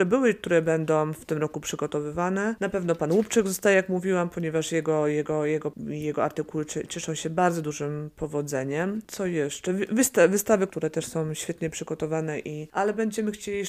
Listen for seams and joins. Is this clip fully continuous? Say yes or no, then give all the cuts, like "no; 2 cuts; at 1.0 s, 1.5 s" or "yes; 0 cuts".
no; 1 cut; at 10.7 s